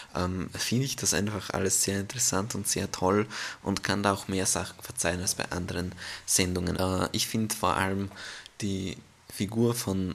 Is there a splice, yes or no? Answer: yes